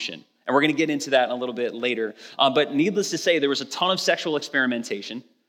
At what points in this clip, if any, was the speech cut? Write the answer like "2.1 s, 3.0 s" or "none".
none